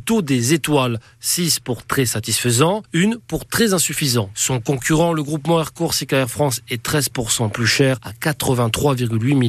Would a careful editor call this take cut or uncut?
cut